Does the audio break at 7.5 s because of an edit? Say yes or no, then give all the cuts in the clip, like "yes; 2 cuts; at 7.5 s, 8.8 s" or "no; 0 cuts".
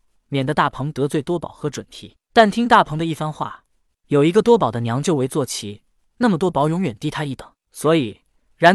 no; 1 cut; at 3.9 s